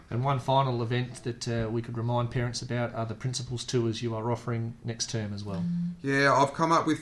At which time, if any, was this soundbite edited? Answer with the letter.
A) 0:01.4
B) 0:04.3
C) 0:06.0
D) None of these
D